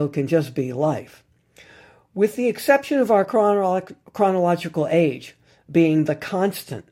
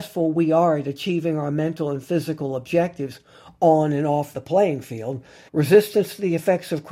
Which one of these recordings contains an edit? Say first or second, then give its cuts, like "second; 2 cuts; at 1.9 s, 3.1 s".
second; 1 cut; at 5.5 s